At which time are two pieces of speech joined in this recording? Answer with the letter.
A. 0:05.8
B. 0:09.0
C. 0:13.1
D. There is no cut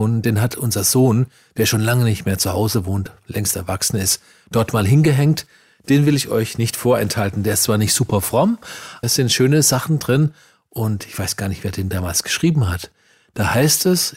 B